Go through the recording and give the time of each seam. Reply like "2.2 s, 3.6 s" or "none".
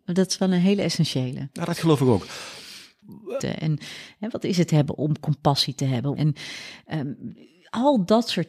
3.4 s, 6.2 s